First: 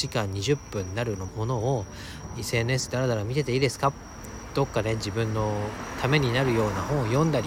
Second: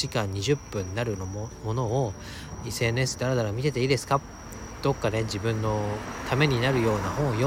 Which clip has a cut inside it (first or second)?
first